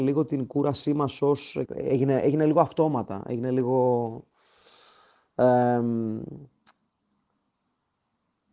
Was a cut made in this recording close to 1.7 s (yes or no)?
yes